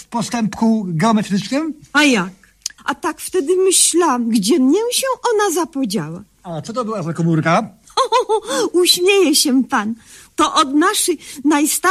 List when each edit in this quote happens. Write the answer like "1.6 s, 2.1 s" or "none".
2.8 s